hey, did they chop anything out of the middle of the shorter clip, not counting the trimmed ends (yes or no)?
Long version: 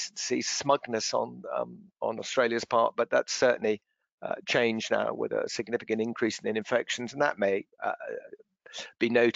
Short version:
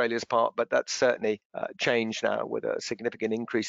yes